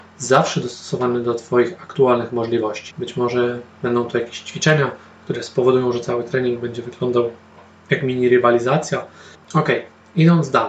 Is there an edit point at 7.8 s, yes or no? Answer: no